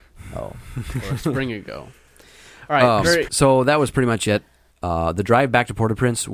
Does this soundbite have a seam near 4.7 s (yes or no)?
yes